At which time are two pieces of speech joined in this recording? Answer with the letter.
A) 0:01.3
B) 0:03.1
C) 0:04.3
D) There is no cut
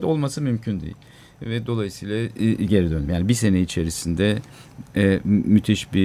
D